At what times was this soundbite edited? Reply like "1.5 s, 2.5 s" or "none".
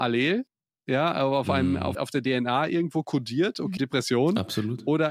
1.9 s, 3.8 s